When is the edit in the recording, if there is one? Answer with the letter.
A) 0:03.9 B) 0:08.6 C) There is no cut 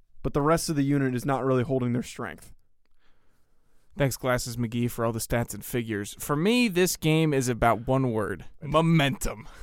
B